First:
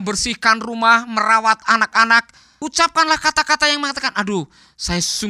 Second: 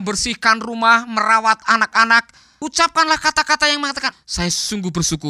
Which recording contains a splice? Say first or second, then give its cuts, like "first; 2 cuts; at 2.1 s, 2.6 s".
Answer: second; 1 cut; at 4.1 s